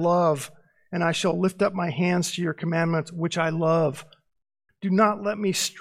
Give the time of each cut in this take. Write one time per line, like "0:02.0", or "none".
0:04.7